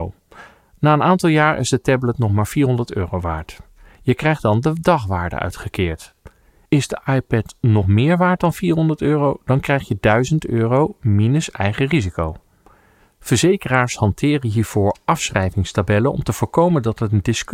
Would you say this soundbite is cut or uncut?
uncut